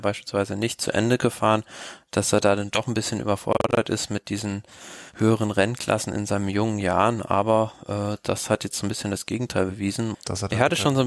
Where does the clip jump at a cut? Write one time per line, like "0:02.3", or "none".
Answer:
0:10.1

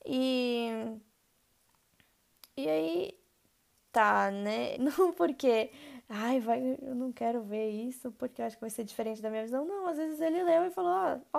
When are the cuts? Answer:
0:04.7

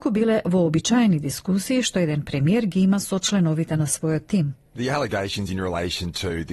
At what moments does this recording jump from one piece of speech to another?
0:04.6

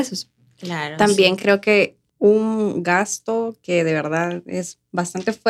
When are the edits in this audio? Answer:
none

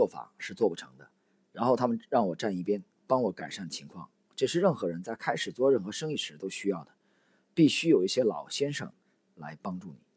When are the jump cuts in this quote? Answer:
none

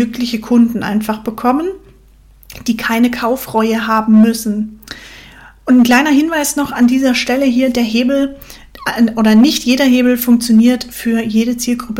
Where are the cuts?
none

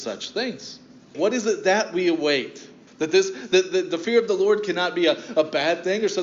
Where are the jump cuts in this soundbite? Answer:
0:01.1
0:02.9

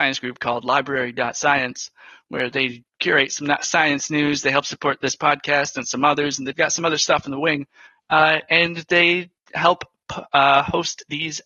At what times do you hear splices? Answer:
none

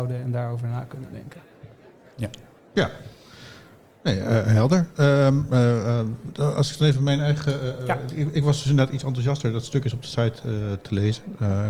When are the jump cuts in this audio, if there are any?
none

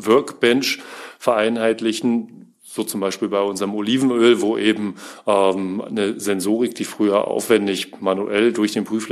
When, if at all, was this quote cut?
none

